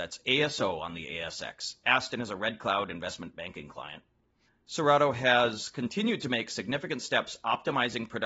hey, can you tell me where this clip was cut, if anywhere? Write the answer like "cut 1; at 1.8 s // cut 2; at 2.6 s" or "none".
cut 1; at 4.4 s